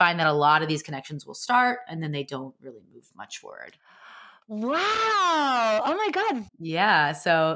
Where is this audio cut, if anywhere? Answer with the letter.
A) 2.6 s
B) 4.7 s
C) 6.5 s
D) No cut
C